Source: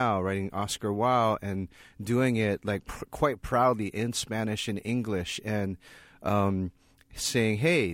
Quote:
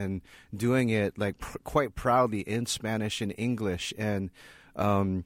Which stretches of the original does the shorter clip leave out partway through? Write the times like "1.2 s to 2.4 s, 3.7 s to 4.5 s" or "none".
none